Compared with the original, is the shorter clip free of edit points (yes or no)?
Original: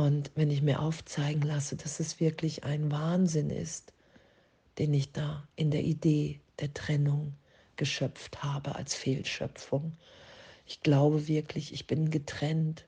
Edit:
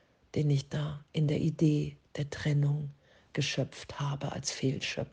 yes